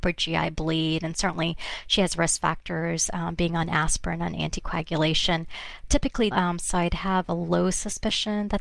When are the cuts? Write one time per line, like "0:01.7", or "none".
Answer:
0:06.3